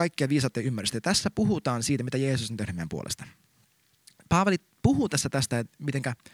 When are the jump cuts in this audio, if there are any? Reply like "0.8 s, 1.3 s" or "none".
none